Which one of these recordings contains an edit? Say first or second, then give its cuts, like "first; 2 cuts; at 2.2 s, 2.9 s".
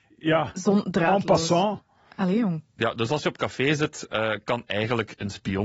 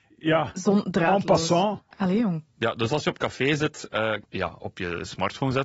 second; 2 cuts; at 1.9 s, 4.2 s